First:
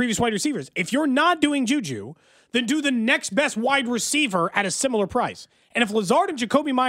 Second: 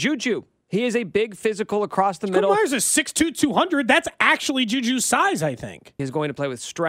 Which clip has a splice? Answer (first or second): second